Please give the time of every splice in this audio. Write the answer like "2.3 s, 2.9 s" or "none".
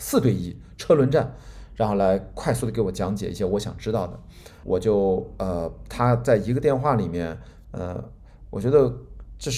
4.6 s, 7.6 s